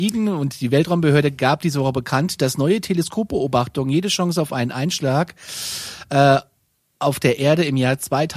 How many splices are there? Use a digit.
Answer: 0